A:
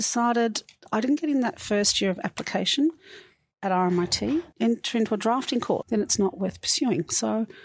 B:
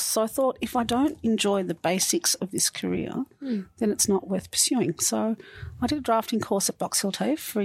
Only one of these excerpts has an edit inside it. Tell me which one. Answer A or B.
A